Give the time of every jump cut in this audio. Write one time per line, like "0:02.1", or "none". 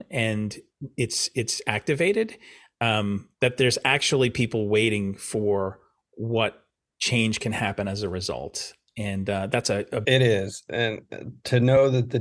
0:10.0